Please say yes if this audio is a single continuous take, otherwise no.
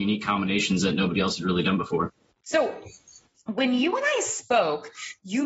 no